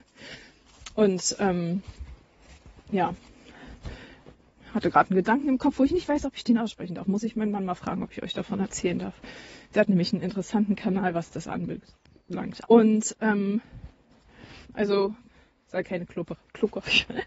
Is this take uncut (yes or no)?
no